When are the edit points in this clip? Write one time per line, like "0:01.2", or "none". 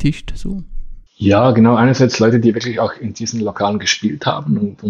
0:01.1